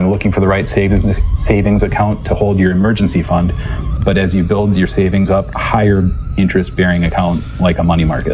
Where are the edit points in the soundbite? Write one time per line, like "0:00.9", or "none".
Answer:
0:04.0
0:05.5